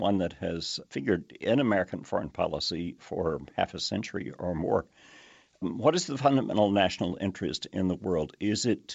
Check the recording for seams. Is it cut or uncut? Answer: uncut